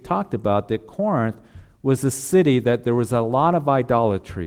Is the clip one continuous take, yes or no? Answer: yes